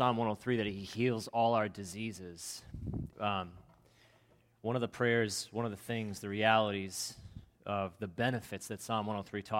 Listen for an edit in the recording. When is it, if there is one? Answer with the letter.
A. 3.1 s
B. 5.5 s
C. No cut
A